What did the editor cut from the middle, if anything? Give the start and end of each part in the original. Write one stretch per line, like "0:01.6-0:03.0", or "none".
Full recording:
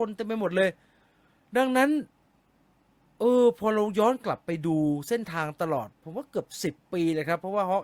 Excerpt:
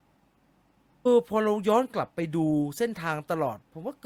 0:03.2-0:03.4